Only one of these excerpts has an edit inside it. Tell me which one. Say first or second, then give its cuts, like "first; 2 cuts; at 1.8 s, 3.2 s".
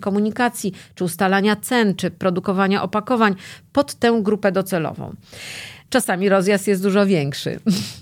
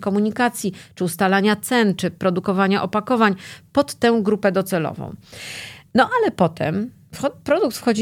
first; 1 cut; at 5.9 s